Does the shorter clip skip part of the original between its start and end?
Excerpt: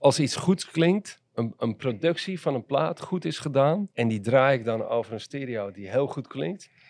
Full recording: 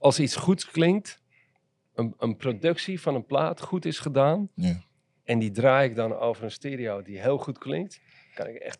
yes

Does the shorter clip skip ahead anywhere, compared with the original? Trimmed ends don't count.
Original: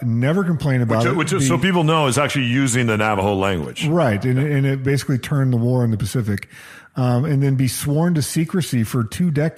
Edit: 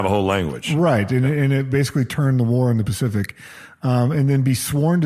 no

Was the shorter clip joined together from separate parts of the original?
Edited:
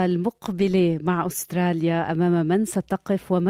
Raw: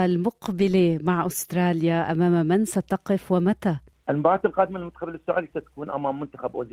no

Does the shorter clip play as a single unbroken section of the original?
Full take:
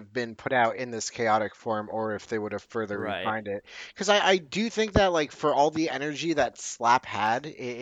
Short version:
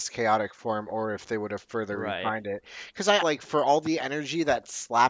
no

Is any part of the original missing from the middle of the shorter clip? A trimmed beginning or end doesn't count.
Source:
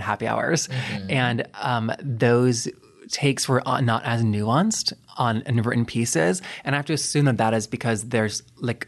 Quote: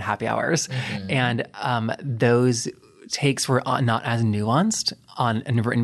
no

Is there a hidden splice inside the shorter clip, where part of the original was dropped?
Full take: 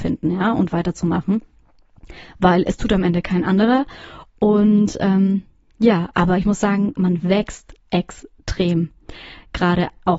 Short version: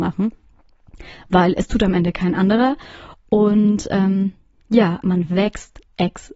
yes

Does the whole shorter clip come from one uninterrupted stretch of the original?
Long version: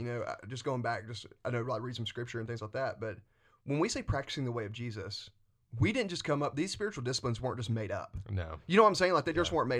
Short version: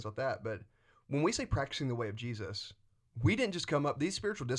yes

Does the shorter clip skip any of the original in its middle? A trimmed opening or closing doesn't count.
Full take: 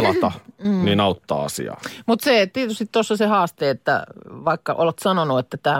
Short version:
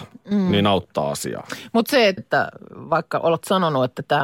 yes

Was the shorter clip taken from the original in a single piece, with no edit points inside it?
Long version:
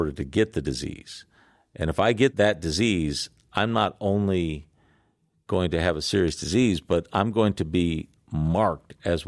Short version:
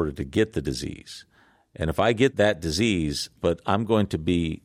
no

